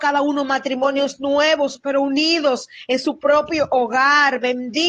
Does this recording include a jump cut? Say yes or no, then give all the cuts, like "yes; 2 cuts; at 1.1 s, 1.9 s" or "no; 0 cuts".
no; 0 cuts